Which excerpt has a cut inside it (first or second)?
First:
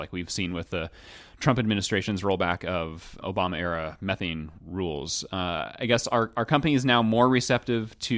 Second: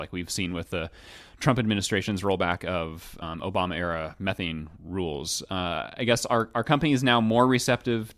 first